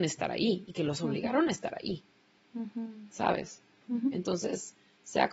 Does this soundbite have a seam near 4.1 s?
no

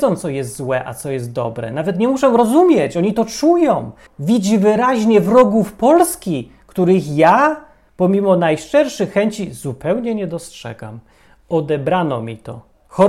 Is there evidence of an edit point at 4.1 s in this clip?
yes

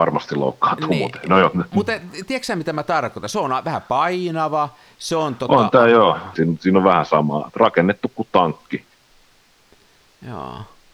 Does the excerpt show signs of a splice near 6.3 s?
yes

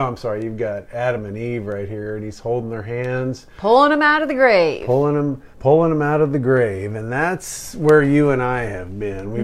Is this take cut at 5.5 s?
yes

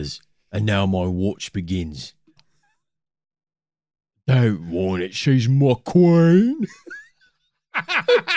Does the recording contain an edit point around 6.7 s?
no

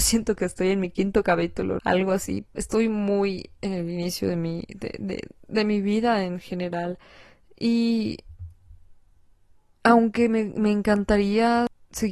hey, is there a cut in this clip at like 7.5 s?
no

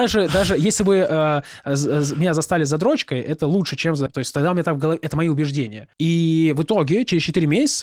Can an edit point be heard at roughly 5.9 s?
yes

